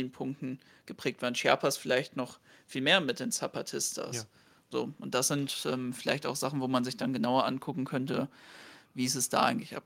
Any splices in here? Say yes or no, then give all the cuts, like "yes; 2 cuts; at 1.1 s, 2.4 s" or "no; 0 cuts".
no; 0 cuts